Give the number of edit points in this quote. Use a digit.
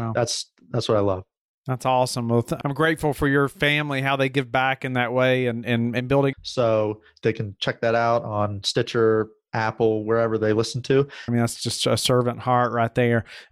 2